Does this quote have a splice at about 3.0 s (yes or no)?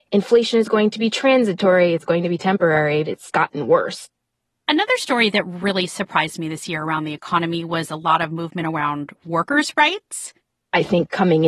yes